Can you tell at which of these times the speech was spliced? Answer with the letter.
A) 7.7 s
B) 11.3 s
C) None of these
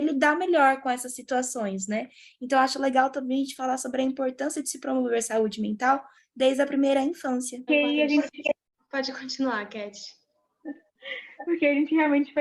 A